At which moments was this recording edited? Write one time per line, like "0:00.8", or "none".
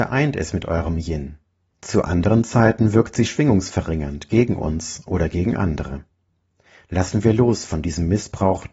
0:01.7